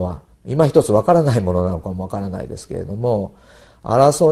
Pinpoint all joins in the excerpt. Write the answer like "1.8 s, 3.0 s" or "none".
none